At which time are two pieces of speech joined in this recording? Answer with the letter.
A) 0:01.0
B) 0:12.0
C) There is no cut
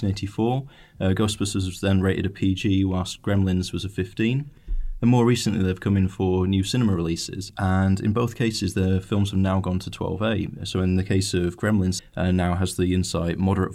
B